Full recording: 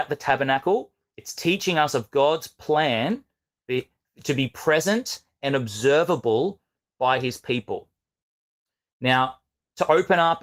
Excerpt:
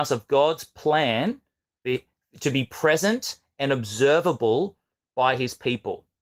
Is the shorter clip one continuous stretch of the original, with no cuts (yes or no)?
yes